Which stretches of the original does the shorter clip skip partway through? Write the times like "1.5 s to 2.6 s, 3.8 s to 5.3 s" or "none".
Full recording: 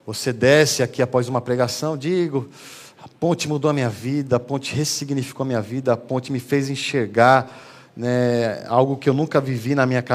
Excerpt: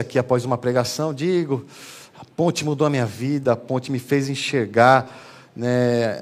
4.3 s to 5.9 s